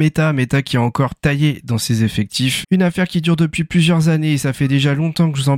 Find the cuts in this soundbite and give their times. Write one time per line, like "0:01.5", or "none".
0:02.6